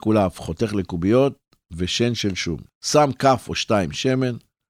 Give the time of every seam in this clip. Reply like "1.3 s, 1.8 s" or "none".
2.7 s